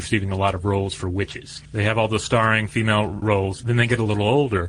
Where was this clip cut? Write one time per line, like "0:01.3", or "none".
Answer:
0:01.6
0:03.2